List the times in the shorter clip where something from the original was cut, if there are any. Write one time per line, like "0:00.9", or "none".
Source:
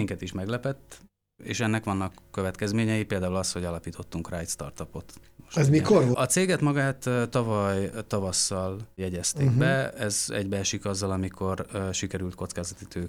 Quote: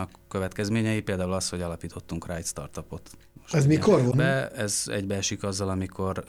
0:04.1